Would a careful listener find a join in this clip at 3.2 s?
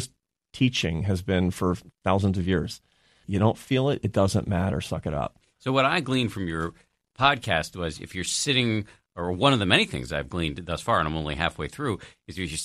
yes; 1 cut; at 3.2 s

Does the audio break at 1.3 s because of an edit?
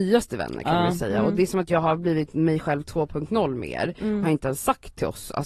no; 1 cut; at 4.2 s

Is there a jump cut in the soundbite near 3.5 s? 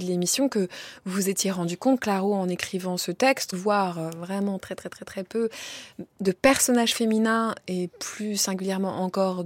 yes; 2 cuts; at 3.5 s, 4.6 s

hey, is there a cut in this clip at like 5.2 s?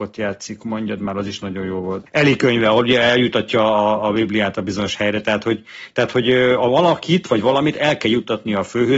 no; 1 cut; at 2.1 s

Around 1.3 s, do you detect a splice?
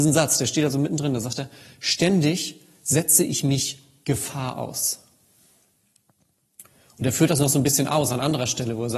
no; 0 cuts

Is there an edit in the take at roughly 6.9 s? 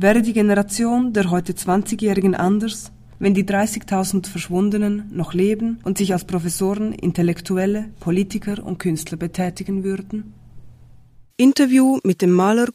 no; 1 cut; at 11.3 s

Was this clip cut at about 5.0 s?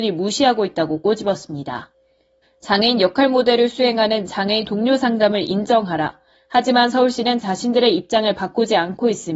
no; 2 cuts; at 2.4 s, 6.3 s

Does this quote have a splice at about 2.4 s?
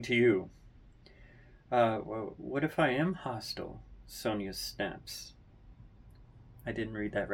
yes; 1 cut; at 2.4 s

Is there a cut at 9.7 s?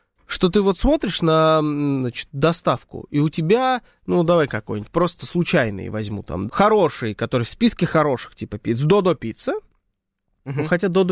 no; 1 cut; at 6.5 s

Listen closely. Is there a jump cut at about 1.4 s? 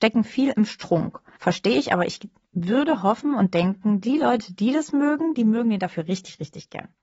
yes; 1 cut; at 1.4 s

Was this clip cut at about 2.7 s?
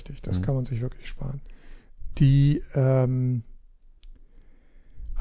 no; 0 cuts

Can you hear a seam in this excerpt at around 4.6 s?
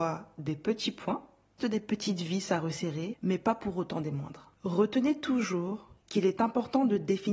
no; 1 cut; at 1.6 s

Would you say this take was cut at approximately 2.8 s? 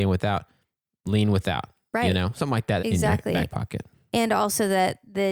yes; 1 cut; at 2.8 s

